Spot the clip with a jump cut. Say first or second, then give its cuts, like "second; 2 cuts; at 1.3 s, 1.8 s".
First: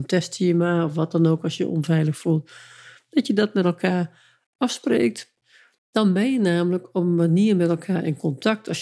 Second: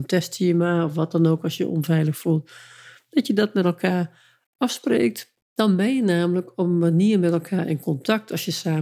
second; 1 cut; at 5.4 s